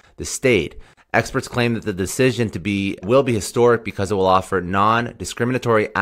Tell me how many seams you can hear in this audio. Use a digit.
1